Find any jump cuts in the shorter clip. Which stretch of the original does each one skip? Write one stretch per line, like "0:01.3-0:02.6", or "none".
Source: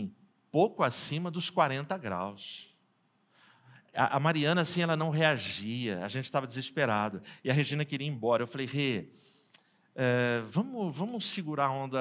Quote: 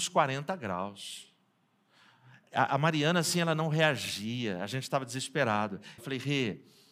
0:07.4-0:08.5